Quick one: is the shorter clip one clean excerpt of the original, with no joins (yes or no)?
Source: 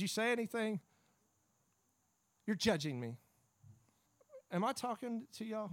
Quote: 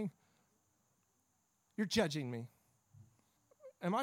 yes